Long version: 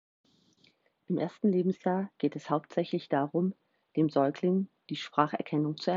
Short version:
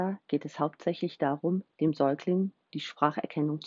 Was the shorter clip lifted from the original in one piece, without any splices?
no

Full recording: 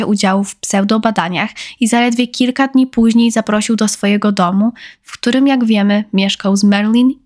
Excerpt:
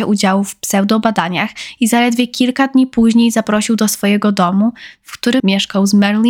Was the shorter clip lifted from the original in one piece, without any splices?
no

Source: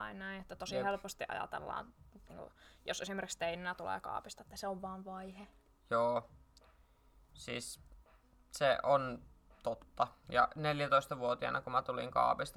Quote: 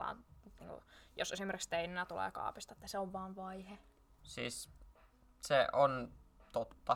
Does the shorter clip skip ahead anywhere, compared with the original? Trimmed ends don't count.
yes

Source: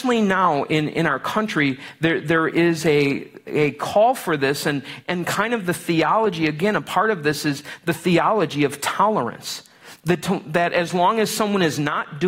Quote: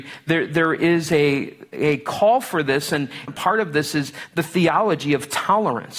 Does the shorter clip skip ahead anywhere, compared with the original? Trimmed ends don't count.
yes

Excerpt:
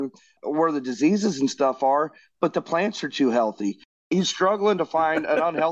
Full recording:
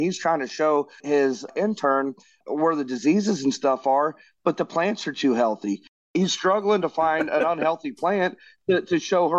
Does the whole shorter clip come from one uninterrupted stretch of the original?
yes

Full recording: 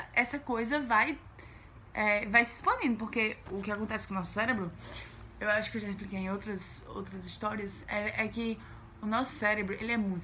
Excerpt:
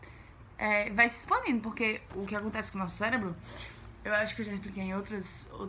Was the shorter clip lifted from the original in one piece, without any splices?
yes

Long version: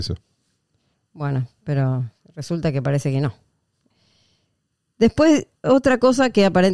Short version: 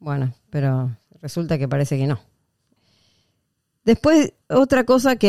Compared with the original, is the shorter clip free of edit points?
yes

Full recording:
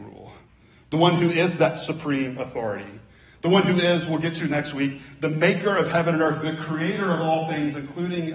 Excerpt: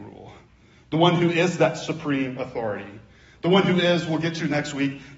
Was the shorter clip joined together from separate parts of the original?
no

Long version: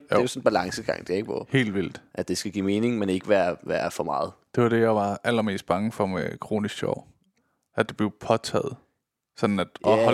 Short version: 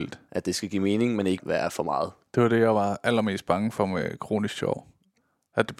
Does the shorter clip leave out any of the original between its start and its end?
yes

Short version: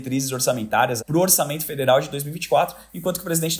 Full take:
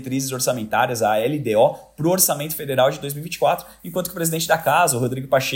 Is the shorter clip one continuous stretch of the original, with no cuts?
no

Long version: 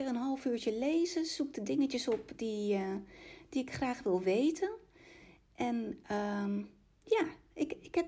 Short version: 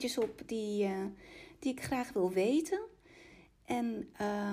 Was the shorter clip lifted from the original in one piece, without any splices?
yes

